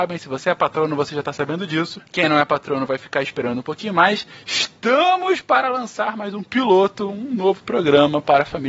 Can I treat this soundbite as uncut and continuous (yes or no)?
yes